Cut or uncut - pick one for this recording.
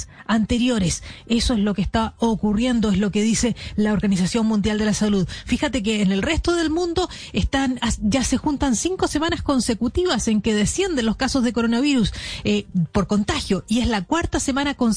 cut